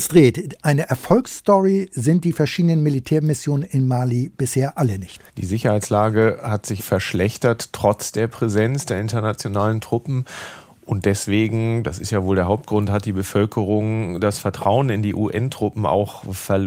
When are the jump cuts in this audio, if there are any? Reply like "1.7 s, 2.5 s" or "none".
5.3 s, 6.8 s